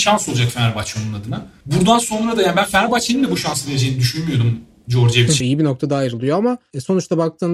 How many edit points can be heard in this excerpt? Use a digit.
1